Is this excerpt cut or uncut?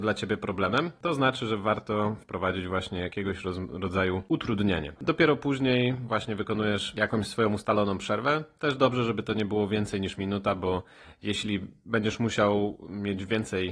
cut